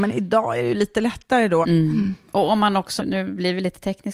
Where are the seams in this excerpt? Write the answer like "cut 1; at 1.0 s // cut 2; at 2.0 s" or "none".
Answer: cut 1; at 1.6 s // cut 2; at 3.0 s